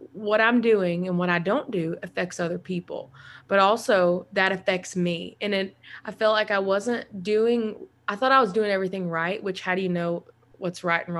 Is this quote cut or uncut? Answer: uncut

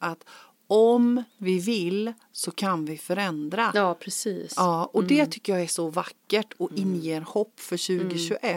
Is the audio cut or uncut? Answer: uncut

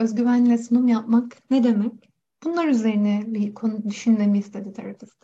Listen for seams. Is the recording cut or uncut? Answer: uncut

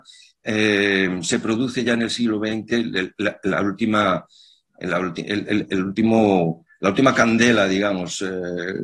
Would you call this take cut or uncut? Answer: uncut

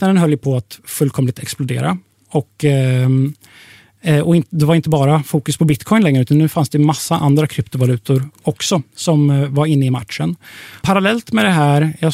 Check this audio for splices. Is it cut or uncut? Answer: cut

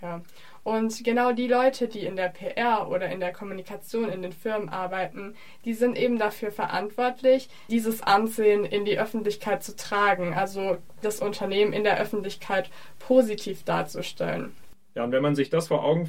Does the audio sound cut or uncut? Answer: uncut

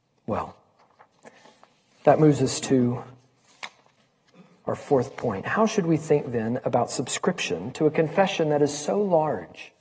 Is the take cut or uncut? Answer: uncut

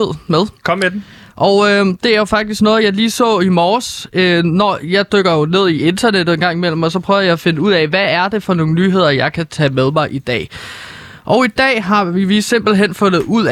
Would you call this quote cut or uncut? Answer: uncut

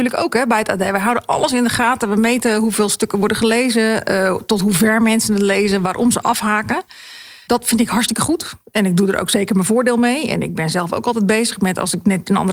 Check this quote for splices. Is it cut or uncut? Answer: uncut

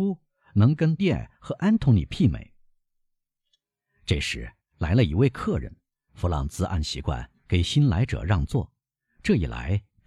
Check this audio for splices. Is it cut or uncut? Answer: cut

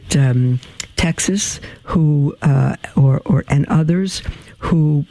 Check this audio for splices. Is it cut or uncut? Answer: uncut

